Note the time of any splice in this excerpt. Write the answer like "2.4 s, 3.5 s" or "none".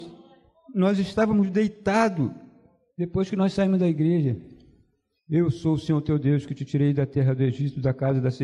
2.9 s, 5.2 s